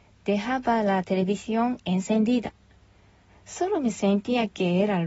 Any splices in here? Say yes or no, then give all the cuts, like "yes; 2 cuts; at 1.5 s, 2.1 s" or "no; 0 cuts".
yes; 1 cut; at 3.3 s